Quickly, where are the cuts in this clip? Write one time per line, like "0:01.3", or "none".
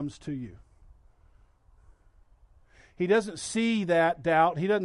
none